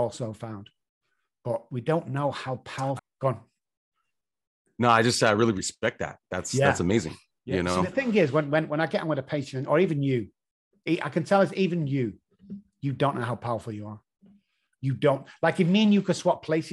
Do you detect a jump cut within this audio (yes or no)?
yes